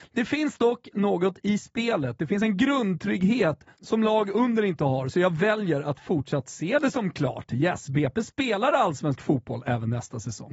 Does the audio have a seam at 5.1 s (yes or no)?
no